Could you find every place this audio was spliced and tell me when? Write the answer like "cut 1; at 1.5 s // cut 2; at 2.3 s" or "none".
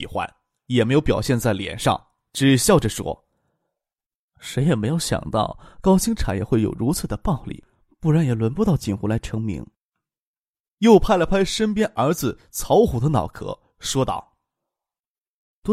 none